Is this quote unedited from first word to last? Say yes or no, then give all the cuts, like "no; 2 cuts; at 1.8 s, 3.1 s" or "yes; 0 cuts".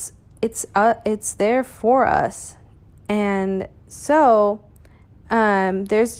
no; 1 cut; at 3.0 s